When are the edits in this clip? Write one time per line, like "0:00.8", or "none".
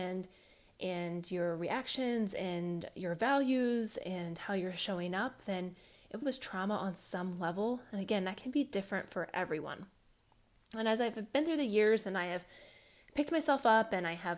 0:06.2